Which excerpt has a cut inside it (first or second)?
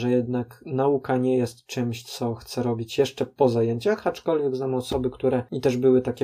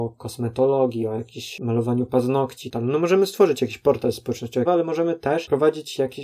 second